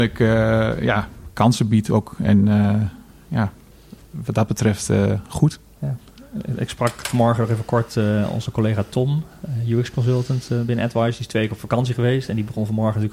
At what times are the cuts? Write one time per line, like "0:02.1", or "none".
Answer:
none